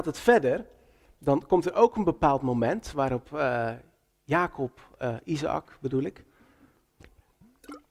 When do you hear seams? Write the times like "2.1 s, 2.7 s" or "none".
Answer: none